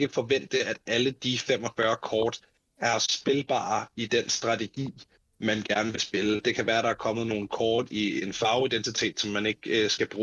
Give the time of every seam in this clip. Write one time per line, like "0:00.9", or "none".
none